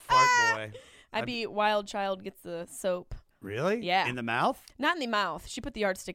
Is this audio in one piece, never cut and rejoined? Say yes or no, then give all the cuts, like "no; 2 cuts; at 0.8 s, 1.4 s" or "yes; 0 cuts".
no; 1 cut; at 3.3 s